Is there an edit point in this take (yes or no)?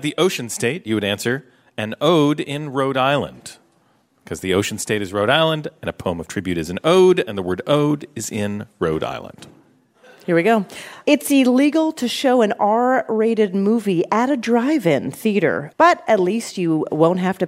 yes